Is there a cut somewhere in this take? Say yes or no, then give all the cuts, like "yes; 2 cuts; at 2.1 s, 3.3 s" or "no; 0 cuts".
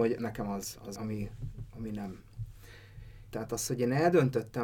yes; 2 cuts; at 0.9 s, 3.3 s